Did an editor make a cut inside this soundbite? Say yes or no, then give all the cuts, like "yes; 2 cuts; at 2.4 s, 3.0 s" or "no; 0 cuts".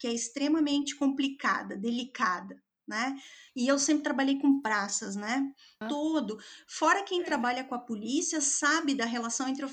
yes; 2 cuts; at 3.5 s, 5.8 s